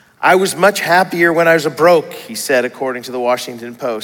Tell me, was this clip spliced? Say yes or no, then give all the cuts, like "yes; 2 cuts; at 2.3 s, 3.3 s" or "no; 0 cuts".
no; 0 cuts